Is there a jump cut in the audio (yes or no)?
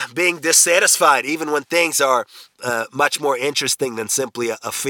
no